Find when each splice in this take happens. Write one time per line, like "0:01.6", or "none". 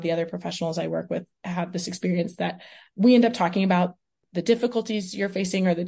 none